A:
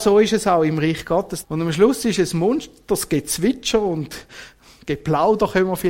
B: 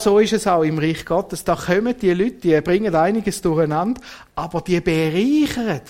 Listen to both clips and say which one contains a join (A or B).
A